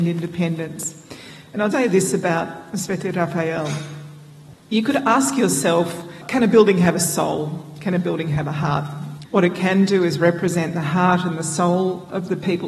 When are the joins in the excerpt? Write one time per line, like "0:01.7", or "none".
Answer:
0:01.7
0:09.2